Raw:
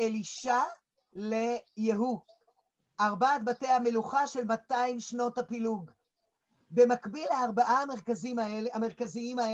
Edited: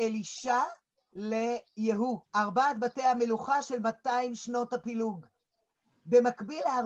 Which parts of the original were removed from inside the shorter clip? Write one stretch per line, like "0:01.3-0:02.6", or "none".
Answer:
0:02.3-0:02.9